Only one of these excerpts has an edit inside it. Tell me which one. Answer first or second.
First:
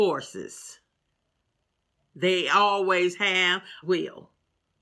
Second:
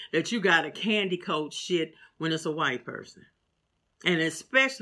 first